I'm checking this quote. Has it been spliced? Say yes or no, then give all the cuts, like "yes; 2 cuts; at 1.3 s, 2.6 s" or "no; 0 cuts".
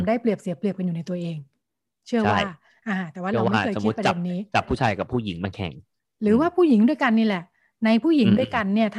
no; 0 cuts